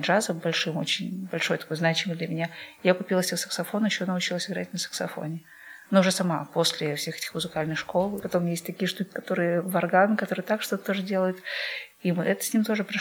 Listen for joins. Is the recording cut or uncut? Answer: cut